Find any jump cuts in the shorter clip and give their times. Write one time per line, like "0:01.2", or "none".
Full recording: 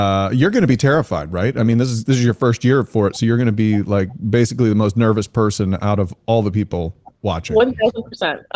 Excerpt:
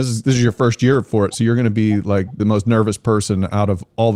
0:02.4